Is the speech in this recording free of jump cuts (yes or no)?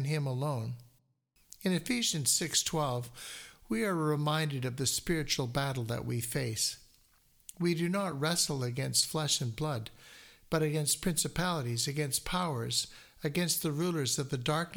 yes